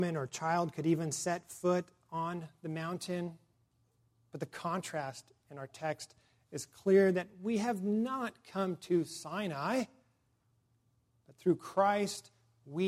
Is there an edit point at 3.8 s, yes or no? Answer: no